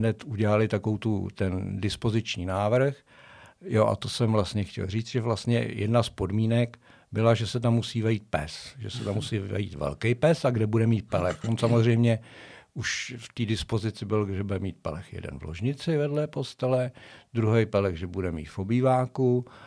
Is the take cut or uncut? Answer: uncut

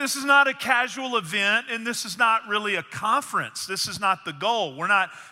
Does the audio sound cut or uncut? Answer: uncut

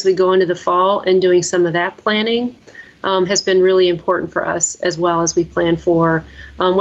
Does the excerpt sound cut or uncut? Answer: uncut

